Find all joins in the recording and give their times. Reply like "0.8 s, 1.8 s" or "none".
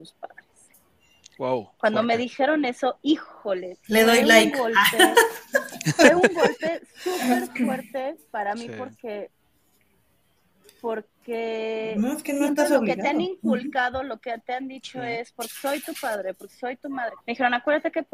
17.2 s